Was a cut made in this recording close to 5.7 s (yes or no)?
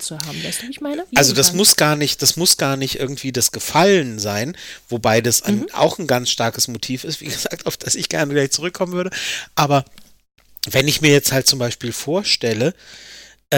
no